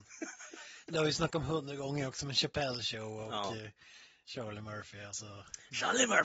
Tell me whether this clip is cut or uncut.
uncut